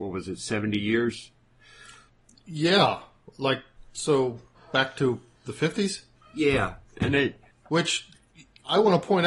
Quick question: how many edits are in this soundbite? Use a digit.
0